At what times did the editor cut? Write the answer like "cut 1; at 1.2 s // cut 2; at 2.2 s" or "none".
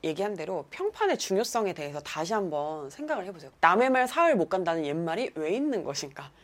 cut 1; at 3.5 s